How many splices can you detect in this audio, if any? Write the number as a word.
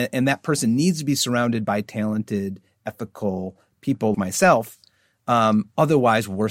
one